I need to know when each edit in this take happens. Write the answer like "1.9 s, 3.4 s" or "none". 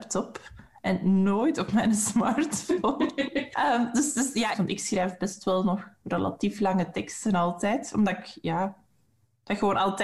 3.5 s, 4.5 s